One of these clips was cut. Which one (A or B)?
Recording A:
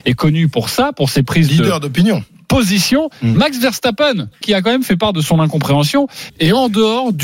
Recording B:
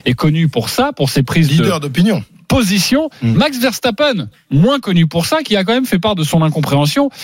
A